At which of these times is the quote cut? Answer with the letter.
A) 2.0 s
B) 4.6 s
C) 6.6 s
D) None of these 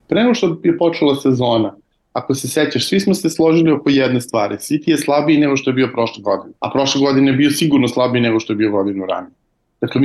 C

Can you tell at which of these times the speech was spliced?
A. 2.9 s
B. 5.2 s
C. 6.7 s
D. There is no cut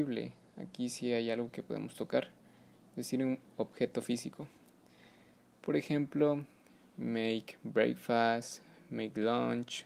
D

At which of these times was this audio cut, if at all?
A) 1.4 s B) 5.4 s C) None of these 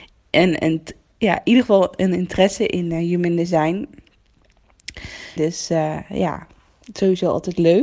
B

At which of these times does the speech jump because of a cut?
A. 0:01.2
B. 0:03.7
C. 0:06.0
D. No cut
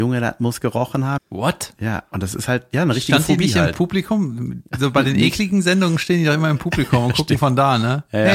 A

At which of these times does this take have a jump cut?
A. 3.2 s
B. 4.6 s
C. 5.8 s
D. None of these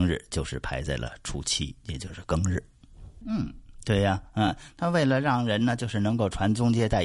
A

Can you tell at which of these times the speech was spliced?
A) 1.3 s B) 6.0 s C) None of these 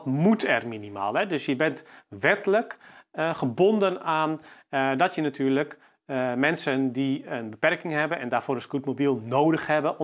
C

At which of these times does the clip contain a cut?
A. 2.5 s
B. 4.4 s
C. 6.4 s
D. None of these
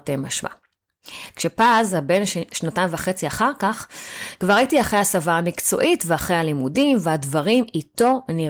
A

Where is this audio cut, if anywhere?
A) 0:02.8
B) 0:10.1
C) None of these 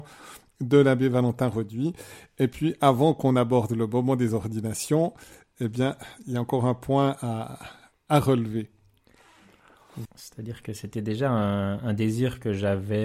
B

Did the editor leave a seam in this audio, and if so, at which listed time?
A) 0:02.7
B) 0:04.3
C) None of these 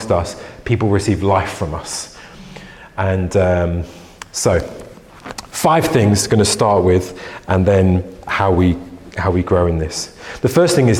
C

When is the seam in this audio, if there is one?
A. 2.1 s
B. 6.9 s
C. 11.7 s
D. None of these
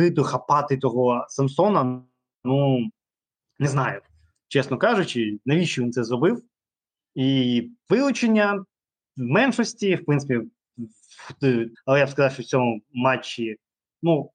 C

